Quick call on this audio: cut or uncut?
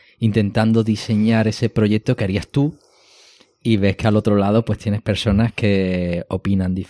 uncut